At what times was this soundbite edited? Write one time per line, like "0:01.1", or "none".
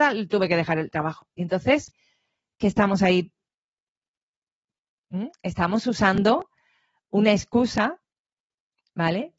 none